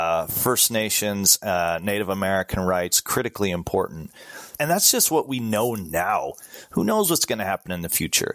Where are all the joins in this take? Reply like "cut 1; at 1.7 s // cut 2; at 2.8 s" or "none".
cut 1; at 4.6 s